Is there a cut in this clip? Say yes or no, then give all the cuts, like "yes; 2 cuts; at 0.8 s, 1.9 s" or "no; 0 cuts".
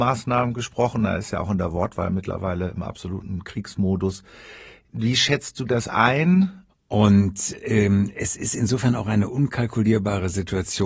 yes; 1 cut; at 6.7 s